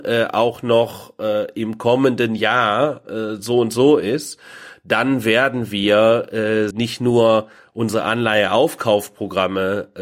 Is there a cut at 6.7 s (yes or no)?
yes